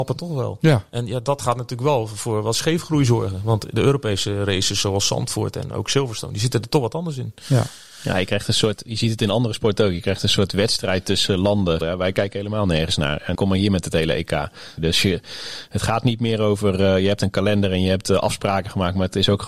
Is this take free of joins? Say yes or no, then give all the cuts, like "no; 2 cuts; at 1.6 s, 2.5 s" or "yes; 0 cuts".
no; 3 cuts; at 11.8 s, 13.3 s, 14.8 s